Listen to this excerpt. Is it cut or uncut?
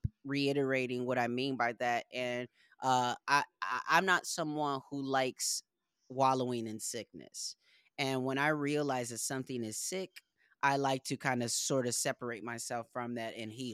uncut